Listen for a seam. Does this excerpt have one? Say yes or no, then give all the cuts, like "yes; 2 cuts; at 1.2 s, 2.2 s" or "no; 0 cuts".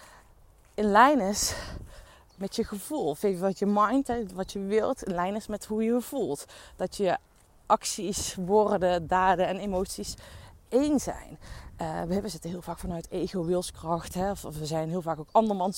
no; 0 cuts